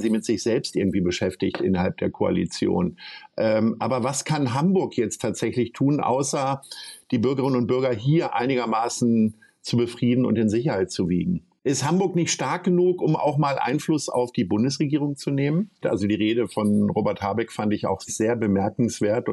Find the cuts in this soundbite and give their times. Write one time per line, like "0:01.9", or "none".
0:15.8
0:18.1